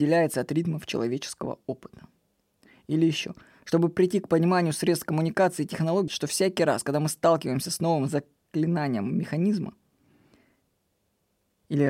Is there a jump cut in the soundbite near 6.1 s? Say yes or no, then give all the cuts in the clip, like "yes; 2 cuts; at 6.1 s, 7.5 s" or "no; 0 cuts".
yes; 1 cut; at 6.1 s